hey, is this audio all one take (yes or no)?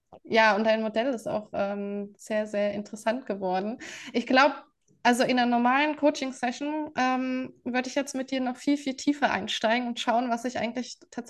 yes